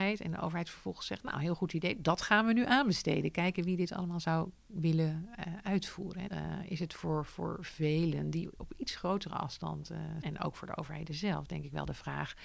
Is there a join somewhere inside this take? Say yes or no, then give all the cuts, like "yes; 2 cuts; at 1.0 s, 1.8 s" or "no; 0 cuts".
yes; 2 cuts; at 6.3 s, 10.2 s